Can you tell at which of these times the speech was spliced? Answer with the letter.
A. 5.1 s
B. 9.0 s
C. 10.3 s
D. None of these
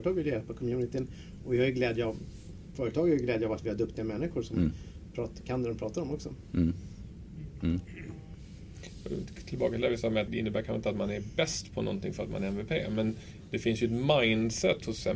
C